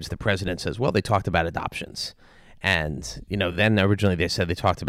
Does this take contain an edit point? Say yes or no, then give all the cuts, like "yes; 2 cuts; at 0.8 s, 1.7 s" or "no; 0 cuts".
no; 0 cuts